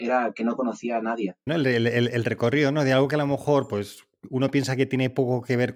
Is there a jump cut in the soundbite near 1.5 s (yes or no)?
yes